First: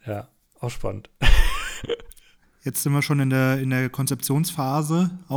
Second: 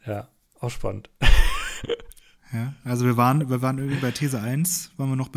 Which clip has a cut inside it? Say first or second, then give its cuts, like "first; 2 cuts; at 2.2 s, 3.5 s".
first; 1 cut; at 2.4 s